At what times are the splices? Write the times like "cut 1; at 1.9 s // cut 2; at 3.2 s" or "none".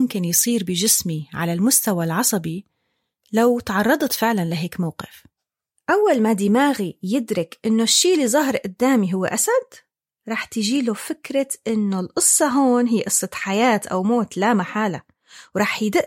none